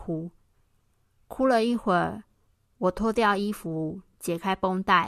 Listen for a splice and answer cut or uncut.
uncut